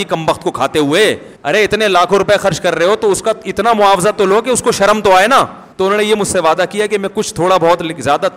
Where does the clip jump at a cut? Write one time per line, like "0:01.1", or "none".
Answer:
0:01.4
0:05.7